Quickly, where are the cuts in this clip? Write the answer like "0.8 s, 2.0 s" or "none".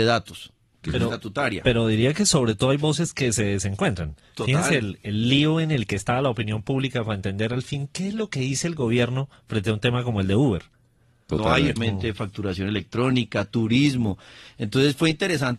11.8 s

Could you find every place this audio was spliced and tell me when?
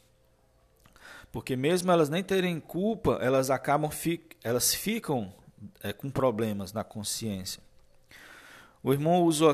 none

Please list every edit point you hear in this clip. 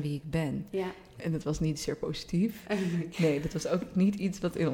1.2 s

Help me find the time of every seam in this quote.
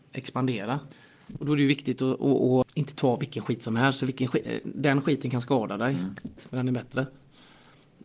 2.6 s, 6.4 s

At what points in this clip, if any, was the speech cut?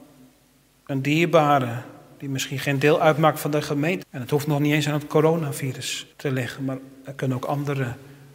4.0 s, 6.1 s

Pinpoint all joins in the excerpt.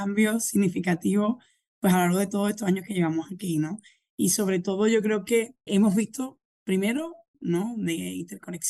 5.7 s, 7.3 s

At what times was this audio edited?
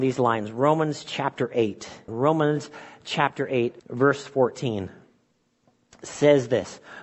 2.1 s, 3.8 s

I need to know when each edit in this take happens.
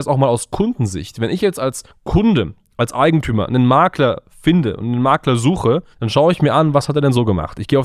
5.9 s

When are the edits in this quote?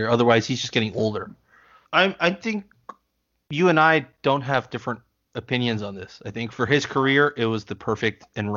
1.8 s

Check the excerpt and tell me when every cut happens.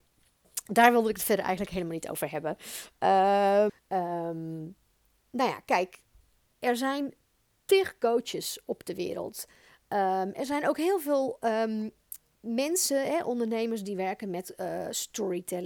3.7 s

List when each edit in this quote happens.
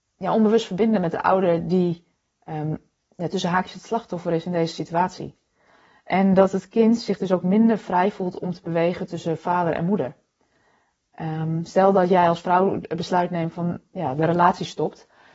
none

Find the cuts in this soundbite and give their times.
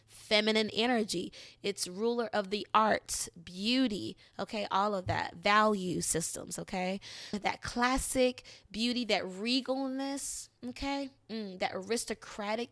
7.3 s

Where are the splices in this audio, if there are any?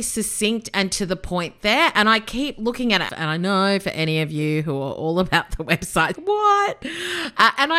3.1 s, 6.1 s

